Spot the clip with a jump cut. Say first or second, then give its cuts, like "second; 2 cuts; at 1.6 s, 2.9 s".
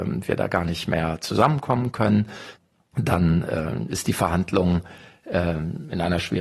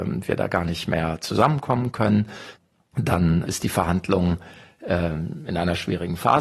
second; 1 cut; at 3.4 s